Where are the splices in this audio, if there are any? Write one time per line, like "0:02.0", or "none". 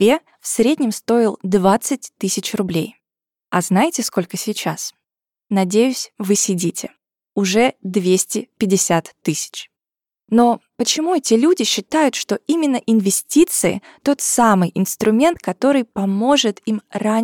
none